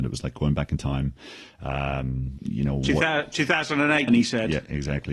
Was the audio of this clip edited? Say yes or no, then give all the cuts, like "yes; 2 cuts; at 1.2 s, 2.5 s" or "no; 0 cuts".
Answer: yes; 2 cuts; at 2.4 s, 4.1 s